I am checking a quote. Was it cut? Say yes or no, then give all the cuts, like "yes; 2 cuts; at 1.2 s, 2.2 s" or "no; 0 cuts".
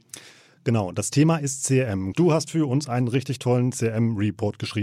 yes; 1 cut; at 2.1 s